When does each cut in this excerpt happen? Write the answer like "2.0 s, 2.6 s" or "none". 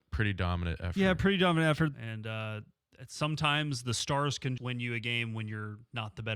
1.9 s, 4.6 s